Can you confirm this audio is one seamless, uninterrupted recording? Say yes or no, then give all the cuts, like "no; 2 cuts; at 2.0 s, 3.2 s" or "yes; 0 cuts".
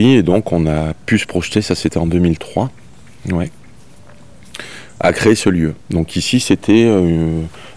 yes; 0 cuts